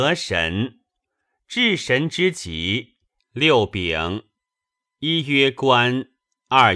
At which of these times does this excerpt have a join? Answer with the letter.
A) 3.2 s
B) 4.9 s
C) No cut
A